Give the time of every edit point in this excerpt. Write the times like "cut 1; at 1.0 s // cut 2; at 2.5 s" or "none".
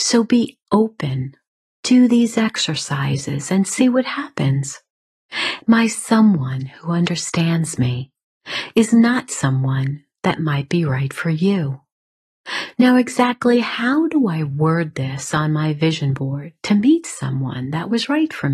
cut 1; at 5.6 s // cut 2; at 12.7 s